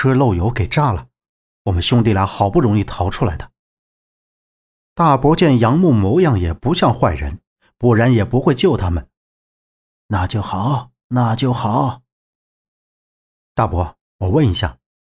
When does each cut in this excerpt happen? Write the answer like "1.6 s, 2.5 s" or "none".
none